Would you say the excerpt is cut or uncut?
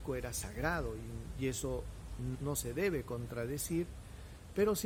cut